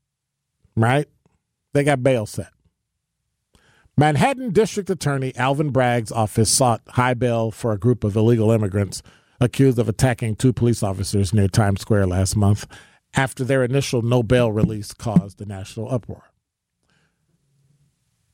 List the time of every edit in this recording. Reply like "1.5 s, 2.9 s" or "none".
none